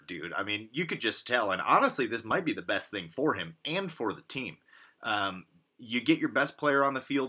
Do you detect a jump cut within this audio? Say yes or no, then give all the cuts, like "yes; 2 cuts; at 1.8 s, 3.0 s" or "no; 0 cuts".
no; 0 cuts